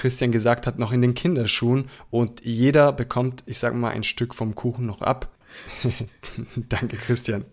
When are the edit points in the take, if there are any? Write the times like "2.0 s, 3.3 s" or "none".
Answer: 5.4 s